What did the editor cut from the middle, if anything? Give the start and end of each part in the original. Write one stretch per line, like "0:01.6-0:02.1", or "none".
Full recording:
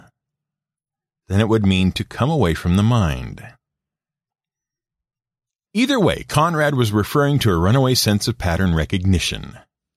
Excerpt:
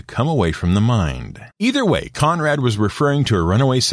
0:03.5-0:05.6